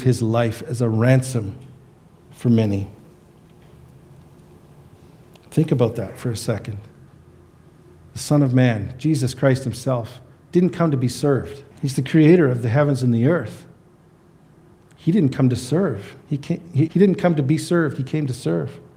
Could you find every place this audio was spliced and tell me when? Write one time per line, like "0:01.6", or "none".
0:11.7
0:16.9